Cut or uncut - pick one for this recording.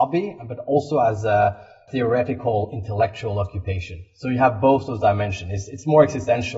uncut